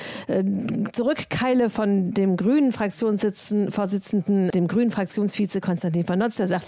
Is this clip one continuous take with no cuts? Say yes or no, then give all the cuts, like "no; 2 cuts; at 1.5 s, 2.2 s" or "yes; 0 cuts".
no; 1 cut; at 4.5 s